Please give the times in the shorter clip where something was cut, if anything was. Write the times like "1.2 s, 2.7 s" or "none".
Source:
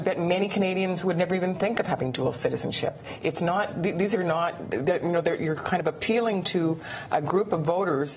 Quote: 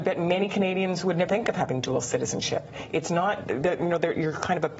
1.3 s, 3.4 s